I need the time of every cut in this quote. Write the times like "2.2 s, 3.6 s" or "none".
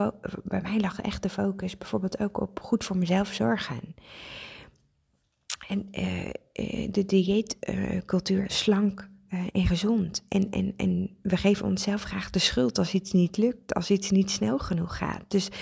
8.4 s